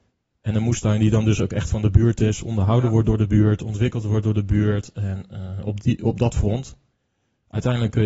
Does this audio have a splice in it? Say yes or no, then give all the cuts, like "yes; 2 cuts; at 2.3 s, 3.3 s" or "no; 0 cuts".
no; 0 cuts